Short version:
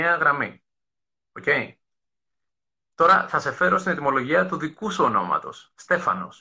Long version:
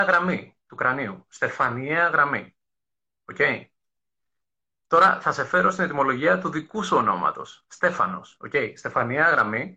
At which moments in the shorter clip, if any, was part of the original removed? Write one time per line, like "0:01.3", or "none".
none